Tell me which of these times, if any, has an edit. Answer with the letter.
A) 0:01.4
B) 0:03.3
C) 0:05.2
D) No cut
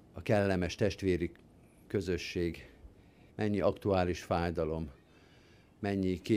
B